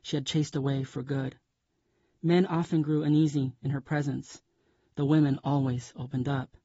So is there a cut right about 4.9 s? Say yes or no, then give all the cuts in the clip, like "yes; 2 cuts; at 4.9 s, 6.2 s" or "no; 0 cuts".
no; 0 cuts